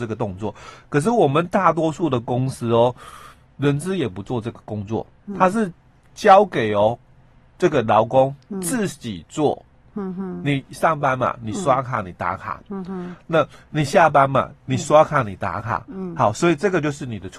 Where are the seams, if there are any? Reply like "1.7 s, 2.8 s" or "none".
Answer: none